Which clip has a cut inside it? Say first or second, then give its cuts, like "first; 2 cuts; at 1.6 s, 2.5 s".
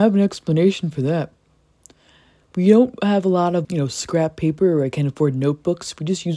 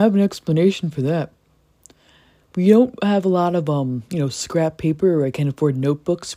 first; 1 cut; at 3.6 s